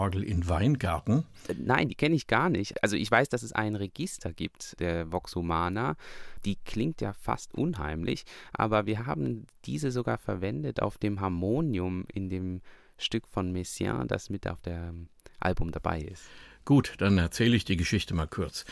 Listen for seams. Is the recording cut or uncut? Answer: uncut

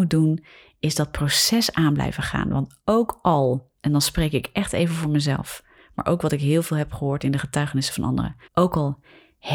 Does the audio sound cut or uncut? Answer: cut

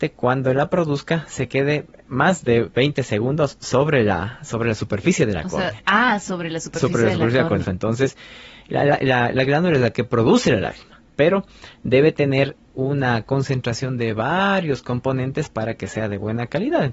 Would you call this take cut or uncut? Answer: cut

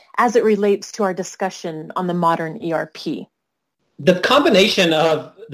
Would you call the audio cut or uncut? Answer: uncut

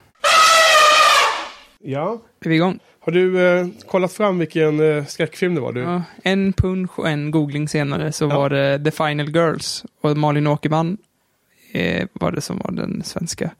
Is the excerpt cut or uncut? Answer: uncut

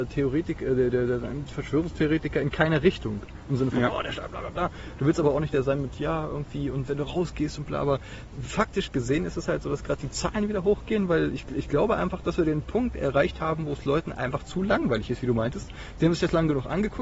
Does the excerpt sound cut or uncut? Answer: uncut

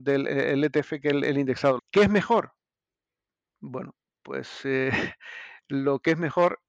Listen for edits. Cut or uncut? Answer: cut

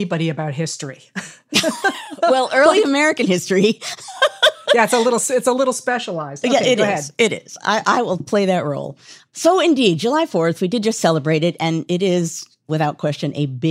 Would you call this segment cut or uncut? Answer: uncut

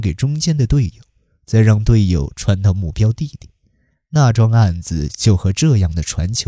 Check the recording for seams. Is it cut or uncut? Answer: uncut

